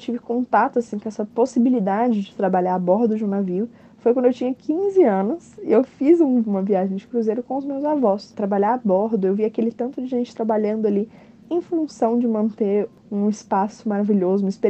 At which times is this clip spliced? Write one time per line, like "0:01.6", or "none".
0:08.3